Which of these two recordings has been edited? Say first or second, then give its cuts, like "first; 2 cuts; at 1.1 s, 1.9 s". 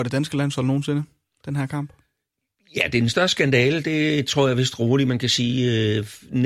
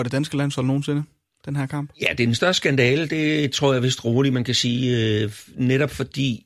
second; 1 cut; at 1.9 s